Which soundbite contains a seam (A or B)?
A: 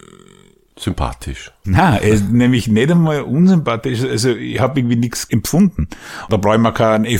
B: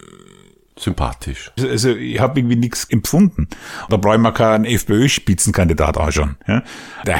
B